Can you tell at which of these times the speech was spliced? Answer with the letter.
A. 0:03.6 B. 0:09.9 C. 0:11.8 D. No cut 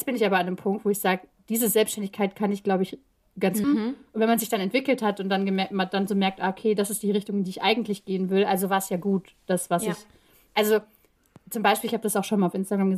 A